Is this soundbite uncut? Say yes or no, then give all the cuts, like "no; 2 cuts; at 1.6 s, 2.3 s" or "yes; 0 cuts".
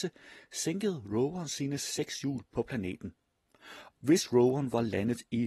no; 1 cut; at 3.9 s